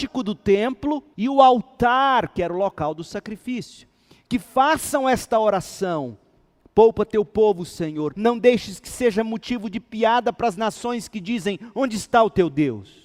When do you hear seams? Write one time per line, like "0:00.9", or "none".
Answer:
0:01.1
0:08.1